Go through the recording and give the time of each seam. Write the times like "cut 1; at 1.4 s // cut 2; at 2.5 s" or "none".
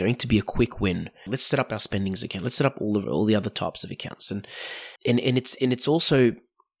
cut 1; at 1.3 s // cut 2; at 5.0 s